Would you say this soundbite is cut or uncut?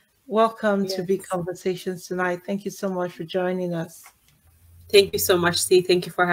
uncut